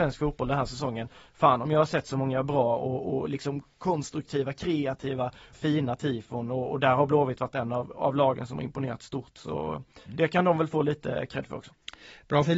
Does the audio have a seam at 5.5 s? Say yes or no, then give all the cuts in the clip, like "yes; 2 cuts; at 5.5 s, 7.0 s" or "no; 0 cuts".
yes; 1 cut; at 5.5 s